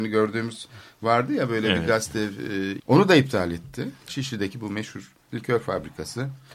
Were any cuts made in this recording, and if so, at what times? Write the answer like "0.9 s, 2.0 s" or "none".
2.8 s, 4.1 s